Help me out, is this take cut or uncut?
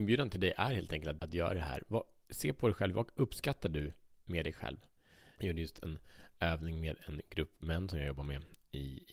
cut